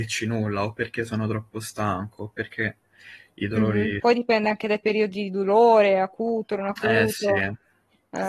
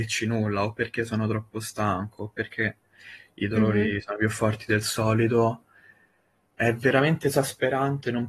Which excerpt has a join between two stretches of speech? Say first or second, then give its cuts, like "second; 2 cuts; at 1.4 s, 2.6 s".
first; 1 cut; at 4.0 s